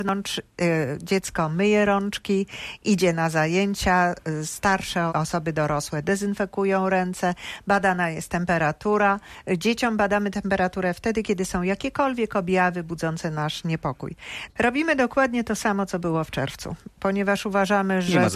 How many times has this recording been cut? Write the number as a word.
two